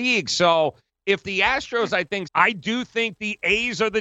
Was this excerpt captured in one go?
no; 1 cut; at 2.2 s

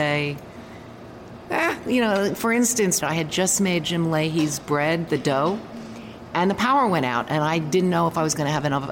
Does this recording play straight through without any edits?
no; 1 cut; at 3.0 s

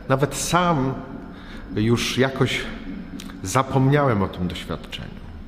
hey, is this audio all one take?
yes; 0 cuts

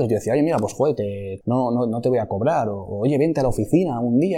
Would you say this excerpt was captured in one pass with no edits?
no; 1 cut; at 1.4 s

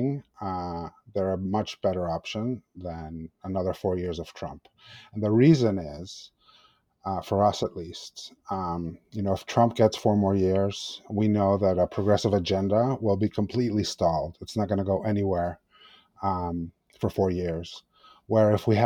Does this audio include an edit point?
no; 0 cuts

